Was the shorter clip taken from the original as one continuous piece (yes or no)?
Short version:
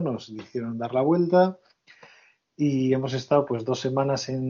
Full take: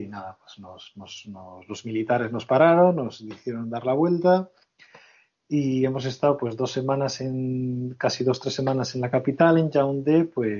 yes